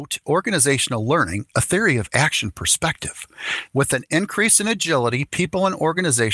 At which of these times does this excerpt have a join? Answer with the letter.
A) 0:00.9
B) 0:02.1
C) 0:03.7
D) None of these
C